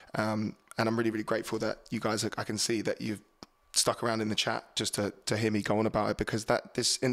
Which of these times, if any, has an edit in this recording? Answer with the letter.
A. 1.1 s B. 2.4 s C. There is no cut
C